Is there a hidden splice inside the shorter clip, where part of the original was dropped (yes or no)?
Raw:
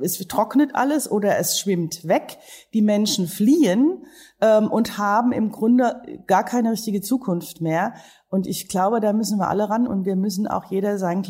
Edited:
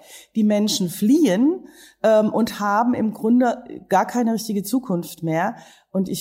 no